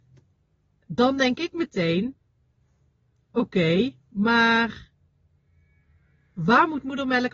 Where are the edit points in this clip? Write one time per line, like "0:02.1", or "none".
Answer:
none